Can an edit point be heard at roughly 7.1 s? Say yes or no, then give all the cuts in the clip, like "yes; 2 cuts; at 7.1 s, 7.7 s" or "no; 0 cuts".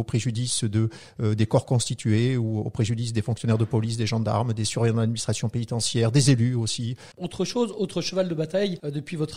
yes; 1 cut; at 7.1 s